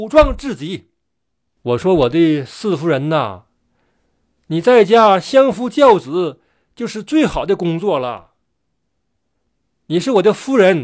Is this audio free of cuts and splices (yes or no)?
no